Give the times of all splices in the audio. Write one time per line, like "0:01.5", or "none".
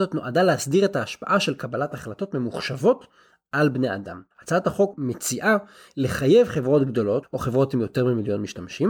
0:04.3
0:07.2